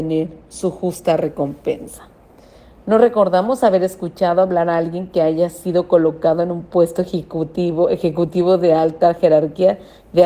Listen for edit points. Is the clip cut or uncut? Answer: uncut